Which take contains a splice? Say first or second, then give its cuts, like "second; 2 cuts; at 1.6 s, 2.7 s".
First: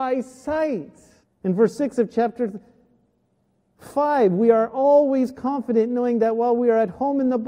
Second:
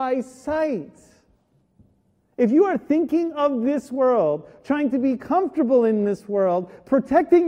first; 1 cut; at 1.2 s